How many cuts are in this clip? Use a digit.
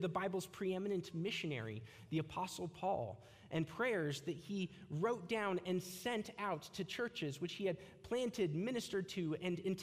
0